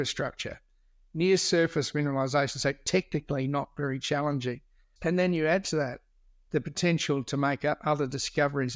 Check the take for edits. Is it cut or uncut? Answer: cut